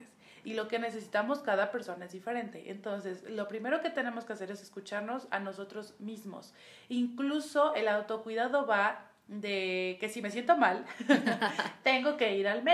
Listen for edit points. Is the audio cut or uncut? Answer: uncut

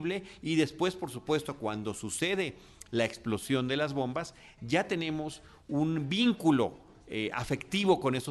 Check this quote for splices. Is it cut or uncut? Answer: uncut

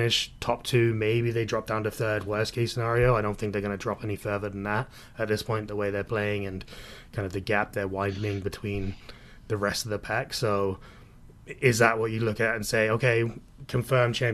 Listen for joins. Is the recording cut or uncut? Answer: uncut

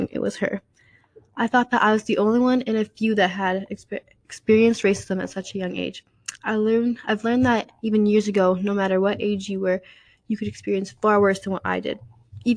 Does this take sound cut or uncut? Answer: uncut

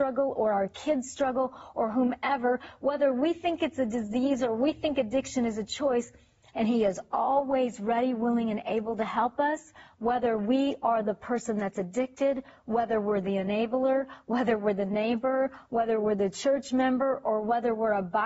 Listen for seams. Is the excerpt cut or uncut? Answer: cut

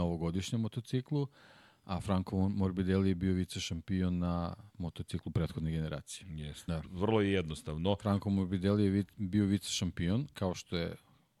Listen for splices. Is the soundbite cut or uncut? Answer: cut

